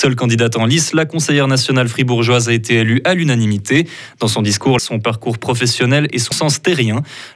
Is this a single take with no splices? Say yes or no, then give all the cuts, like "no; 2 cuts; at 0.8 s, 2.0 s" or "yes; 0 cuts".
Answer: no; 2 cuts; at 4.8 s, 6.3 s